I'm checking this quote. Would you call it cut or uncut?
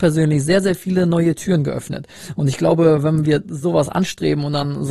uncut